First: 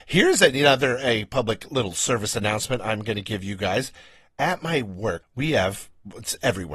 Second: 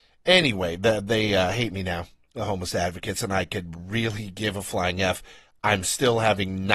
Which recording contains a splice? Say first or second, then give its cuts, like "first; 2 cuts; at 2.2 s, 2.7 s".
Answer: first; 1 cut; at 5.2 s